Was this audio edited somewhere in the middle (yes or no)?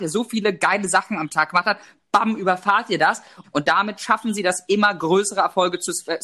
yes